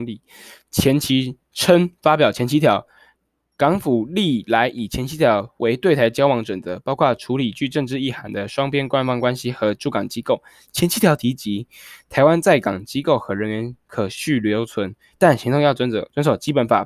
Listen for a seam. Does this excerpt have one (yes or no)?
no